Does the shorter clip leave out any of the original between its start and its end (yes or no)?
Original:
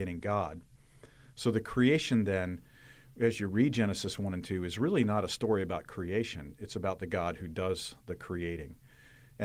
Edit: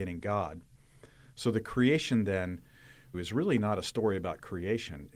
yes